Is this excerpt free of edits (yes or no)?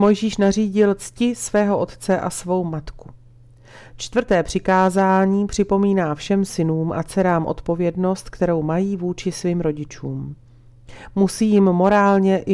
yes